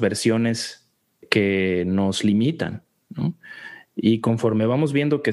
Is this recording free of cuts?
yes; 0 cuts

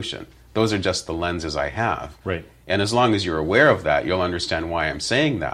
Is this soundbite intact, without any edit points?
yes; 0 cuts

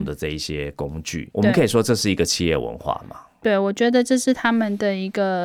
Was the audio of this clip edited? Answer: yes; 1 cut; at 1.3 s

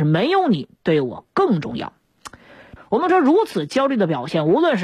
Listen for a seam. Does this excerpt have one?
yes; 1 cut; at 2.8 s

